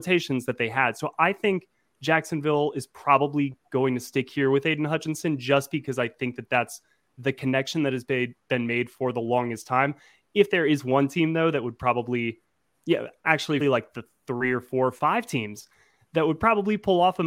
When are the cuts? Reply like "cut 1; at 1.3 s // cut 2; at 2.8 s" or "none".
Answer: cut 1; at 13.6 s